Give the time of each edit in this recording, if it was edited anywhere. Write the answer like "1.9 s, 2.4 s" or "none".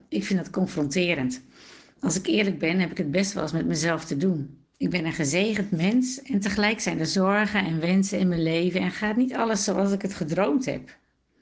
4.7 s